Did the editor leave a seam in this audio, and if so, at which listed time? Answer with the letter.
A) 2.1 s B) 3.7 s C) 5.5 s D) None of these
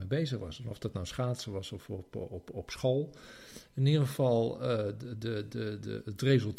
D